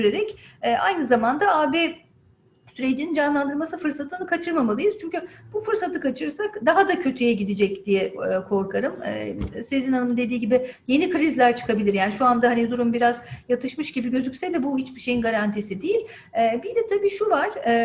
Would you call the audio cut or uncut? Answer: uncut